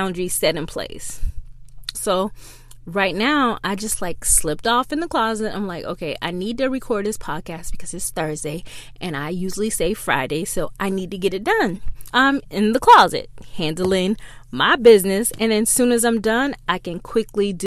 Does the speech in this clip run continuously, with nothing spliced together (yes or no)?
no